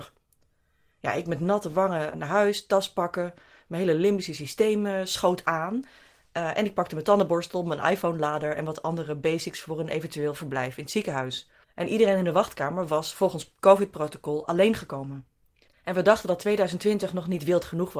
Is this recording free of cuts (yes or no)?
no